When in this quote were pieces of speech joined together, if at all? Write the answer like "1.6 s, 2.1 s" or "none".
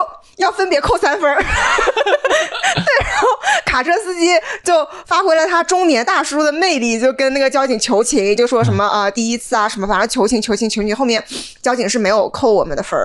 none